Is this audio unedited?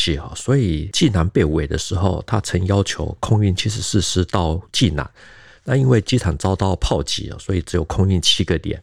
yes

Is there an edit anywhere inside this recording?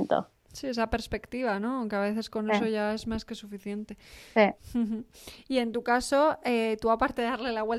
no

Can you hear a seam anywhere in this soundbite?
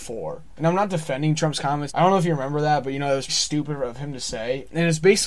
yes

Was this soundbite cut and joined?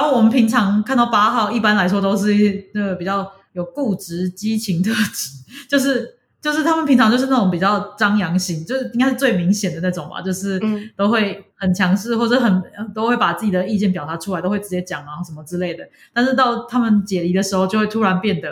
no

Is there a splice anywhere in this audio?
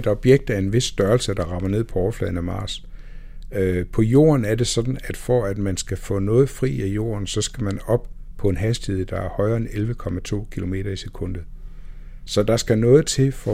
yes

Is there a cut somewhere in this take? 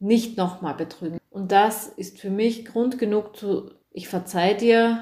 yes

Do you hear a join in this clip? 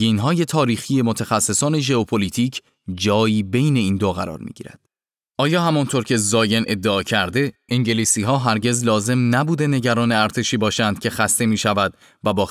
yes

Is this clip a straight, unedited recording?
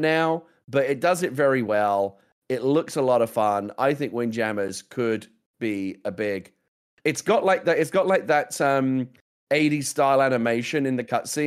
yes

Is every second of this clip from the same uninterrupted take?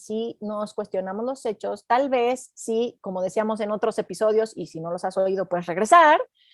yes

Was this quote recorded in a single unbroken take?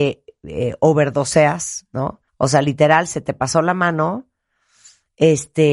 no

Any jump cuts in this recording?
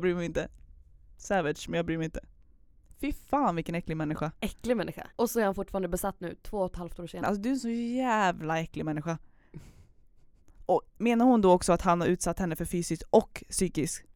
yes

